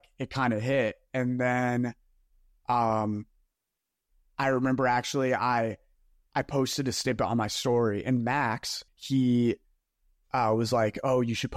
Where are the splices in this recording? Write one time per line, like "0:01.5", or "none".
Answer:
0:08.9